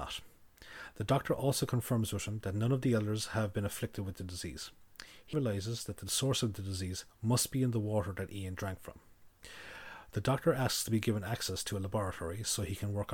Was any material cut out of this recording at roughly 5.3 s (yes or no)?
yes